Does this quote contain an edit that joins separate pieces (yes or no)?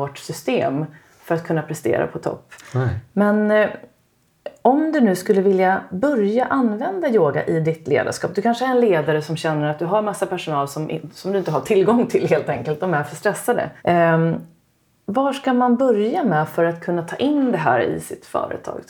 yes